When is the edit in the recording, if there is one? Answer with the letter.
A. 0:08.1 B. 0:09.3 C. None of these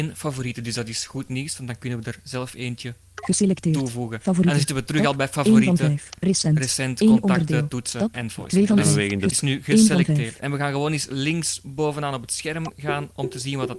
B